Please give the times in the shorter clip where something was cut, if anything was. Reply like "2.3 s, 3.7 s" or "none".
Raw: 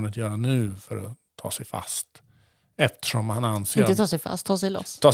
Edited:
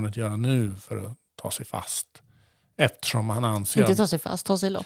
none

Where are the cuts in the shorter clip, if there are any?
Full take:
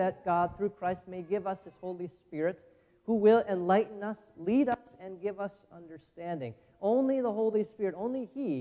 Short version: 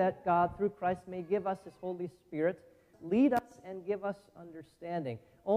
2.9 s

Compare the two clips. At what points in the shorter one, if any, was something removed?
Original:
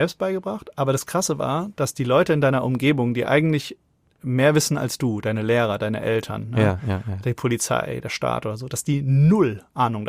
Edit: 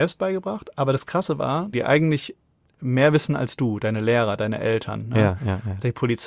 1.7 s

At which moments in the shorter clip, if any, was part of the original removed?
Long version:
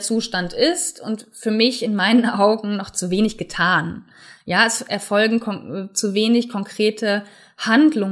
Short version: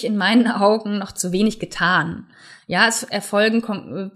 none

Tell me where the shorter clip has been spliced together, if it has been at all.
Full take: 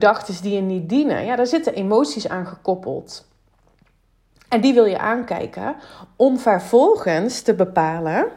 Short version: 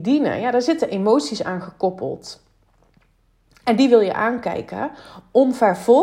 none

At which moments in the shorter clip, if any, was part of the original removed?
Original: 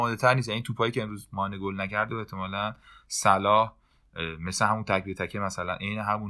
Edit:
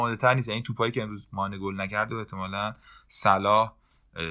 none

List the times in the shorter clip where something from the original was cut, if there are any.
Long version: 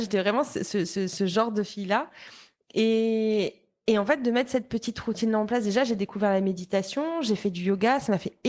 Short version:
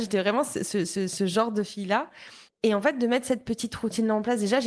2.5 s

